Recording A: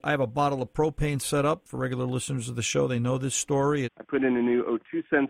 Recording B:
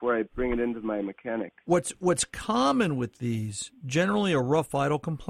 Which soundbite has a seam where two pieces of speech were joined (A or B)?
A